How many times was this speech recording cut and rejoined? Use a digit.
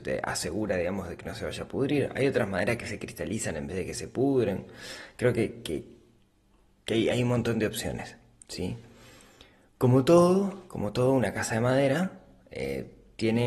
0